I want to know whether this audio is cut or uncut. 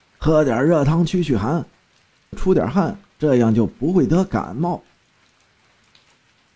cut